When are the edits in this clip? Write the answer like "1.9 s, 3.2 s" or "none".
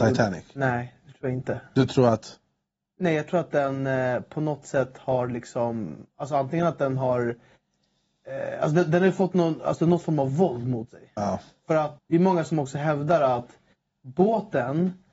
12.0 s